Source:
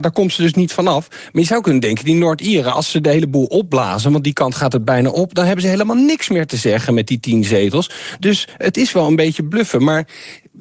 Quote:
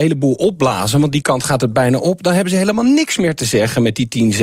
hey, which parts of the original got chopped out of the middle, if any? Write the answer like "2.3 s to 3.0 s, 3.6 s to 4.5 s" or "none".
none